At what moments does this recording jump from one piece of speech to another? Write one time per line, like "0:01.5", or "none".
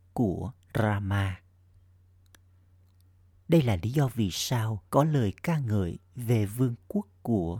0:03.3
0:04.9